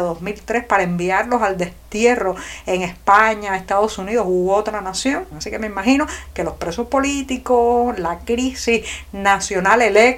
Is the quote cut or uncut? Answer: cut